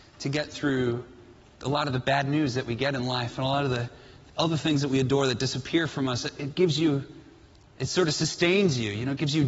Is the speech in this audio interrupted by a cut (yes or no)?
no